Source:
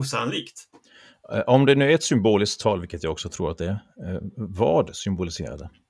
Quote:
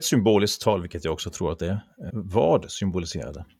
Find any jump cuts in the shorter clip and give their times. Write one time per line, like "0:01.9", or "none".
0:02.1